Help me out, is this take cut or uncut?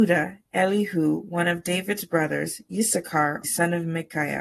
cut